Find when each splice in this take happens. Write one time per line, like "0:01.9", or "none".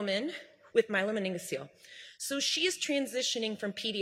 none